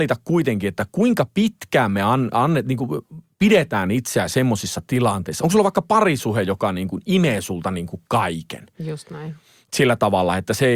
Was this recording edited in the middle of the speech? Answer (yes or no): no